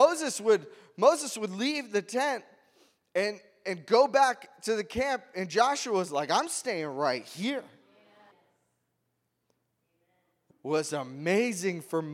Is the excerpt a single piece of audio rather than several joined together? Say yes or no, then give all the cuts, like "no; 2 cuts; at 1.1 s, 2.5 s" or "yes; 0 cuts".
no; 2 cuts; at 8.3 s, 10.5 s